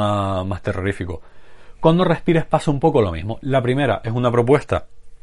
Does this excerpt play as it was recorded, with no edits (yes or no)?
yes